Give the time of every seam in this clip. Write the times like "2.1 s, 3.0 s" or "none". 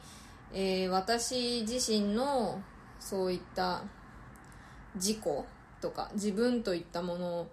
none